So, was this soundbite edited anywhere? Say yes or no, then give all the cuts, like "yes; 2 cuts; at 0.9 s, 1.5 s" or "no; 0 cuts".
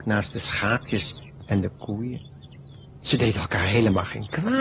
no; 0 cuts